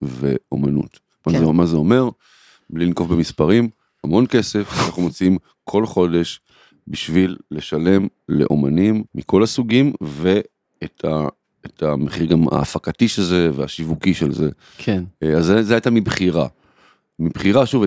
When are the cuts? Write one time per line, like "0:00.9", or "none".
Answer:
0:09.1